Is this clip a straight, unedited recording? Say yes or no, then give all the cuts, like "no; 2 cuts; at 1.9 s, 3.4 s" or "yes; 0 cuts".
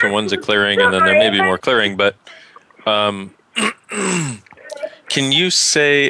yes; 0 cuts